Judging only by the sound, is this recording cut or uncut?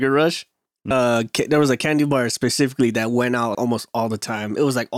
cut